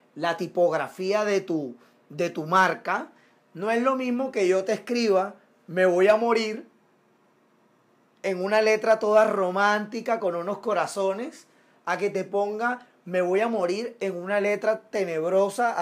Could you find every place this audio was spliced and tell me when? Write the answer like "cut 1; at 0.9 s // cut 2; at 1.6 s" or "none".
none